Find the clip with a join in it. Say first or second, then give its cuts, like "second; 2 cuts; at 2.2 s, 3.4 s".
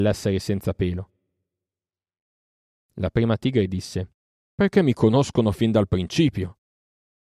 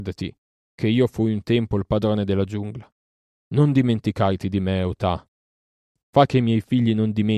first; 1 cut; at 4.4 s